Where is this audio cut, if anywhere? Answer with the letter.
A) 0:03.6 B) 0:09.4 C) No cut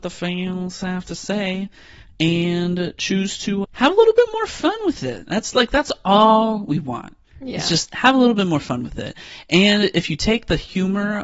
A